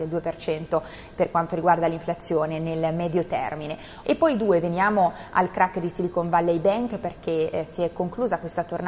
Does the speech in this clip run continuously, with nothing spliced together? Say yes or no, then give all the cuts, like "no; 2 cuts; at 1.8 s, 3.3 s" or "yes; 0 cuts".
no; 1 cut; at 4.0 s